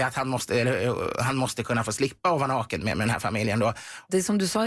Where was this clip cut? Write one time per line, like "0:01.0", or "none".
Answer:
none